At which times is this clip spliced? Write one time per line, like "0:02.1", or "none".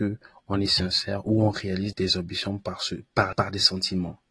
0:01.9
0:03.3